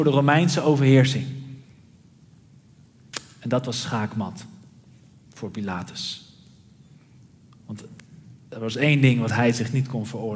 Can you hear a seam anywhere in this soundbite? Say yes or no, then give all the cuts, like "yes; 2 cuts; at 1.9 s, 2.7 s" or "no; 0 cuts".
no; 0 cuts